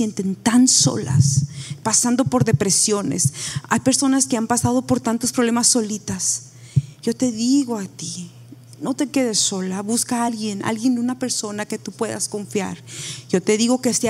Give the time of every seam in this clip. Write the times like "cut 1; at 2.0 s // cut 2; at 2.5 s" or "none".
none